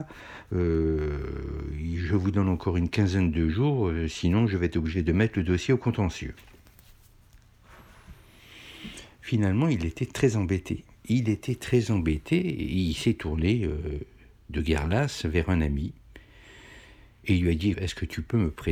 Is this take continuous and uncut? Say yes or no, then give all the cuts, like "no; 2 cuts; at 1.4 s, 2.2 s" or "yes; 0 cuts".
no; 1 cut; at 17.7 s